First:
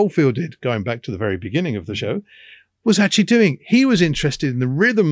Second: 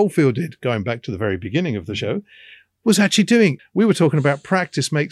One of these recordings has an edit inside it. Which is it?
second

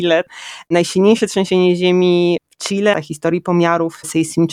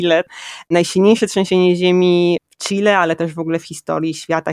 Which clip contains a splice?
first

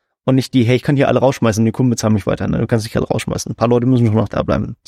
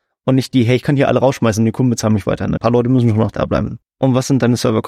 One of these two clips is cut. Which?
second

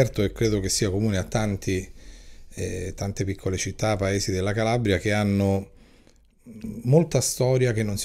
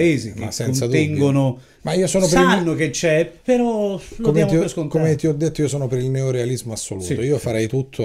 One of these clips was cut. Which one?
second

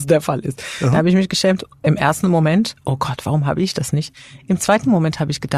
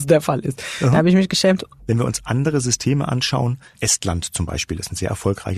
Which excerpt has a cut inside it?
second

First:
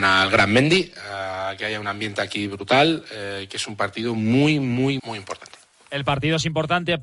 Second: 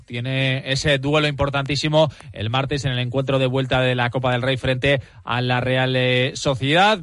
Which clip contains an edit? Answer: first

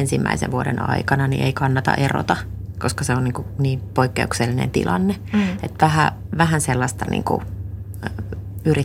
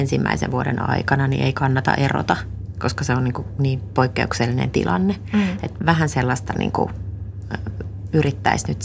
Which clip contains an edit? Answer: second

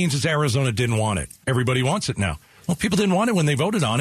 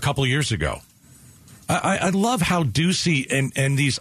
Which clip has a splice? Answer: first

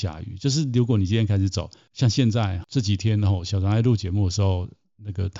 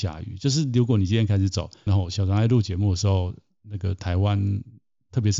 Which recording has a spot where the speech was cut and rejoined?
second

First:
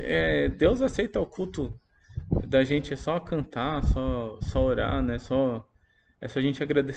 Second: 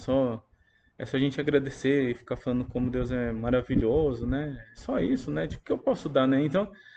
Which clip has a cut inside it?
second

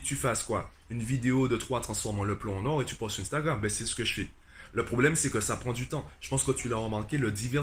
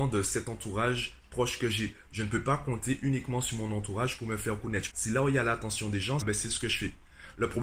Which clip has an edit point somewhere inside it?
second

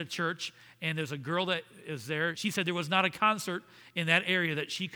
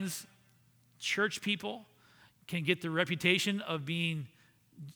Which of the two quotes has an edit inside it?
first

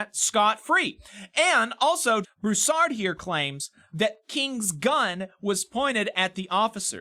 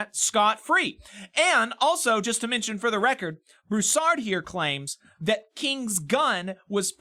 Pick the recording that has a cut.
first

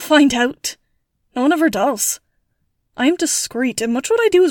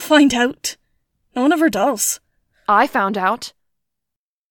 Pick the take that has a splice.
second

